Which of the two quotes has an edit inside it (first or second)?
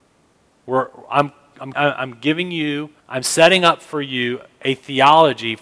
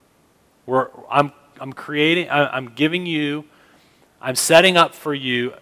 first